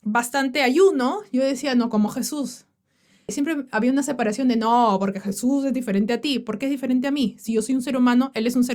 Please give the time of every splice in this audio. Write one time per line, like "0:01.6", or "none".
0:03.3

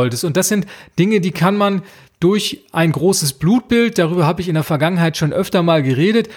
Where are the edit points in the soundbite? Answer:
none

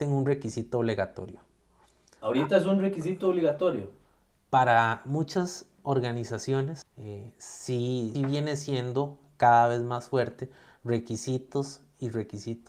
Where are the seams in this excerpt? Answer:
0:06.8
0:08.1

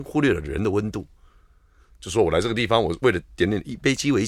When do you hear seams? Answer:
0:01.9

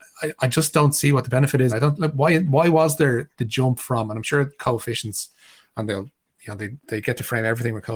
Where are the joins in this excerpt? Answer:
0:01.7
0:07.0

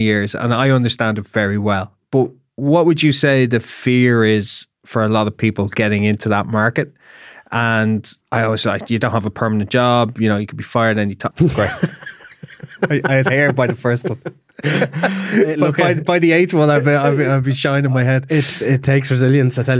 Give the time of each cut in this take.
0:08.2
0:11.3

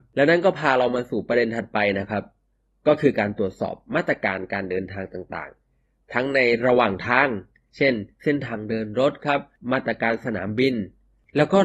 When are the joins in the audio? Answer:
none

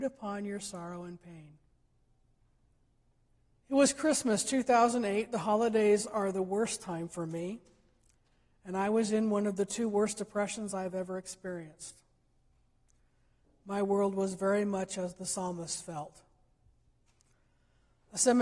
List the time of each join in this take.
0:03.5

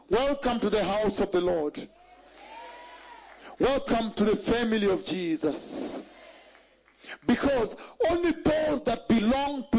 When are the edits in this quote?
none

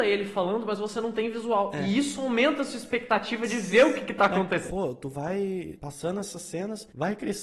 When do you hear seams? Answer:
0:04.7

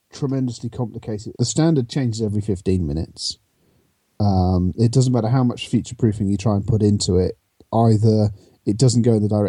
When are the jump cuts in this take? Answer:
0:01.3

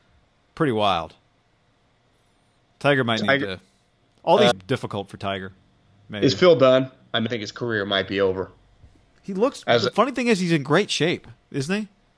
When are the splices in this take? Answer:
0:04.5
0:07.3

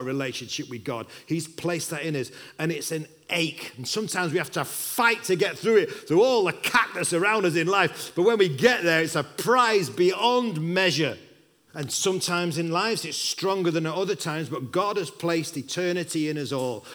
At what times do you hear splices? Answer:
0:11.7

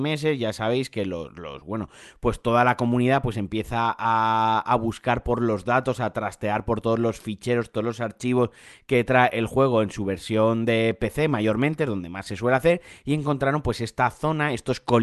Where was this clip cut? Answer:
none

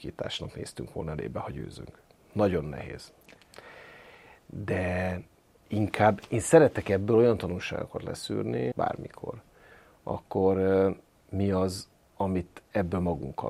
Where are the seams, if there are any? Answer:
0:08.7

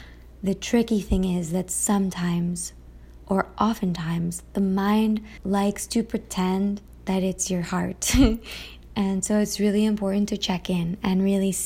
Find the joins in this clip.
none

